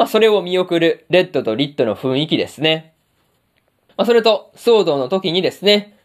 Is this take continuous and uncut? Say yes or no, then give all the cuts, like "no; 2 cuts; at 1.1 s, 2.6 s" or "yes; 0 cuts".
no; 1 cut; at 3.9 s